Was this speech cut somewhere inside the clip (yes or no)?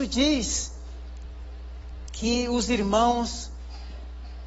no